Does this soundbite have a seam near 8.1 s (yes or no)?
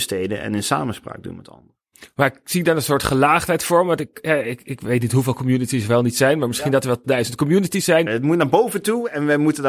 yes